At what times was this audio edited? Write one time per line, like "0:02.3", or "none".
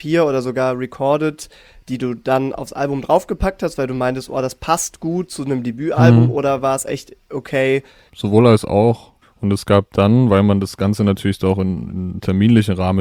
0:08.1
0:09.2